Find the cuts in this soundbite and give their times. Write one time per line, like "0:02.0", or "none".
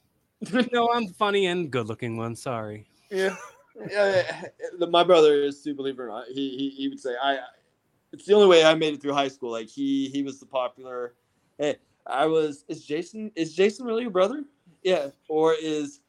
none